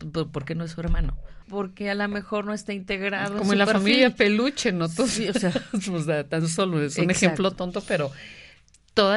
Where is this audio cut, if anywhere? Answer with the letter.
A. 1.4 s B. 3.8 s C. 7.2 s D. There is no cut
A